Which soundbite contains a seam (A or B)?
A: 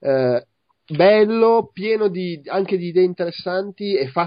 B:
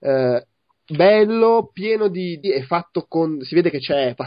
B